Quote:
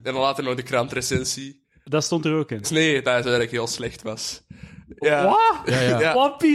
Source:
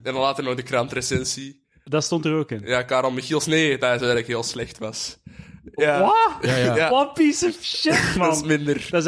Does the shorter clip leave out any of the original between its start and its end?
yes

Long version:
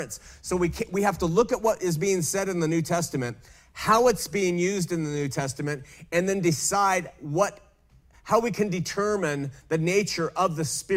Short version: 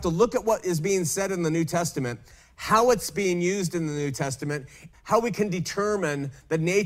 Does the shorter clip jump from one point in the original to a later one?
yes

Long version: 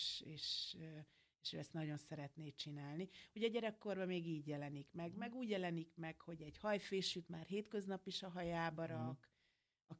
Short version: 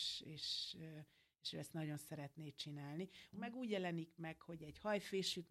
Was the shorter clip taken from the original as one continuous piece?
no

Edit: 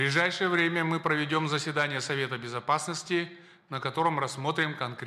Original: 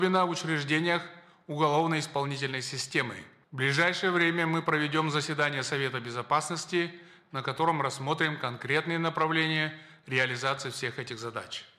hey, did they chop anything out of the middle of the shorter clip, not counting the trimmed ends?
no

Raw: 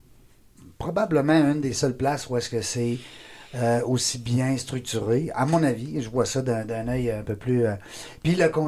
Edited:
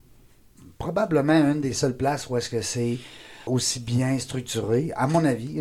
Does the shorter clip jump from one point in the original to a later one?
yes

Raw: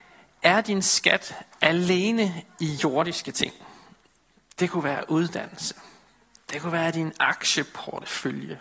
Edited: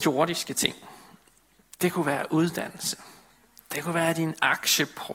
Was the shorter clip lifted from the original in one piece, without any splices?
yes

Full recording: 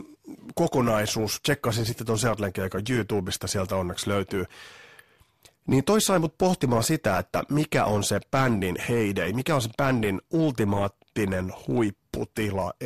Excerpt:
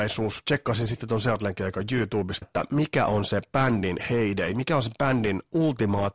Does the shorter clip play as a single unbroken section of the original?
no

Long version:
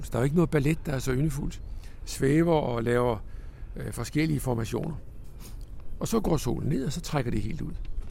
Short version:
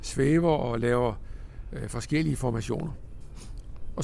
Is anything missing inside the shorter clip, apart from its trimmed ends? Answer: no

